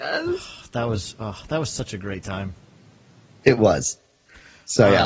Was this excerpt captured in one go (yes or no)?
yes